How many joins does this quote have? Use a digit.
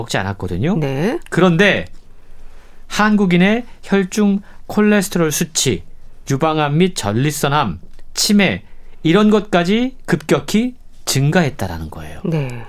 1